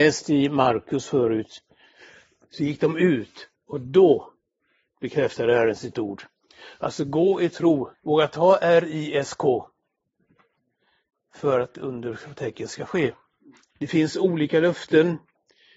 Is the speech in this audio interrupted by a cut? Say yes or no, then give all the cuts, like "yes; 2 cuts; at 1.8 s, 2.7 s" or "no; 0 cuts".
yes; 2 cuts; at 7.9 s, 13.7 s